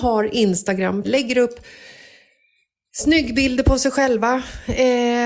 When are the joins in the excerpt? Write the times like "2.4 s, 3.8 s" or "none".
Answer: 1.0 s